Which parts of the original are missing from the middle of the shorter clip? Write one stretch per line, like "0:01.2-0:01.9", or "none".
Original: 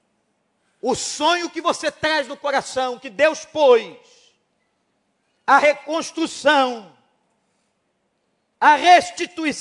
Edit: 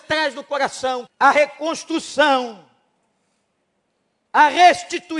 0:03.0-0:05.3